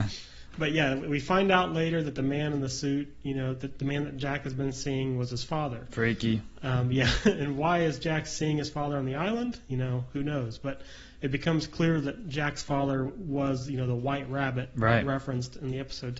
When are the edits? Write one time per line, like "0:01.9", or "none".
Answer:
none